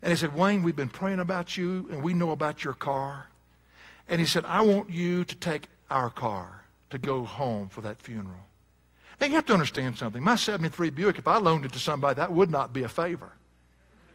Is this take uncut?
yes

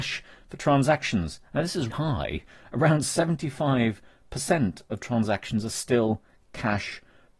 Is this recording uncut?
no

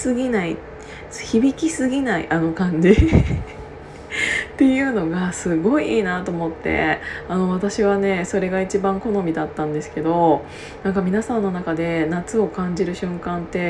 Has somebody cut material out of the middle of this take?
no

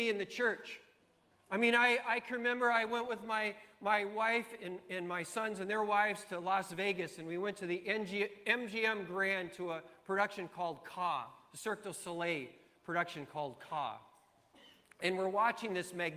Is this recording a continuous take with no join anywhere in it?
no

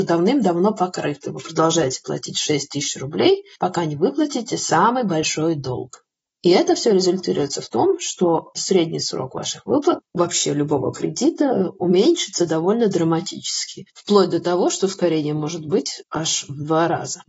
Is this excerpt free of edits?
yes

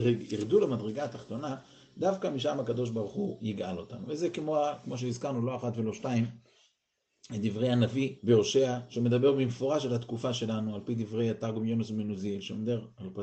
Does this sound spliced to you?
yes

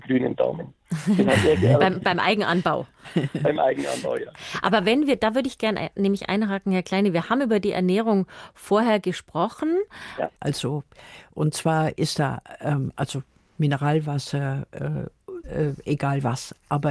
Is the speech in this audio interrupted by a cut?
yes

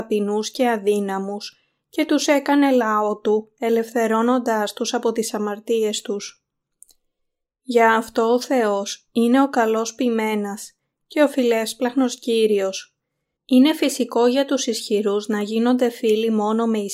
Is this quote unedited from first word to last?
no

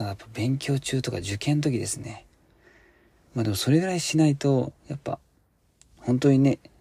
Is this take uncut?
no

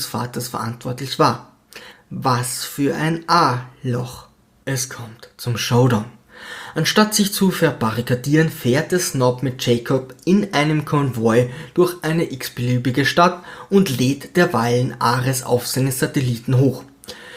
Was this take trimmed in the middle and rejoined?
yes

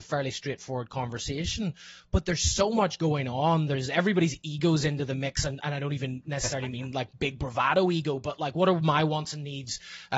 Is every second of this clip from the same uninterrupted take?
yes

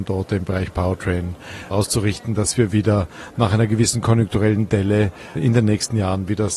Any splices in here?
yes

